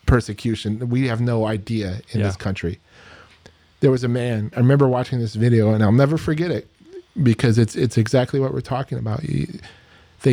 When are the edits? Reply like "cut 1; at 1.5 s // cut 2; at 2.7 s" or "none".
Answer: cut 1; at 4.5 s